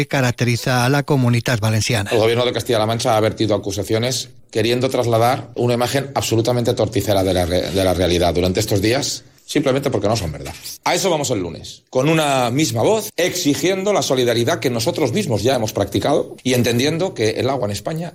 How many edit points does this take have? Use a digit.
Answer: 2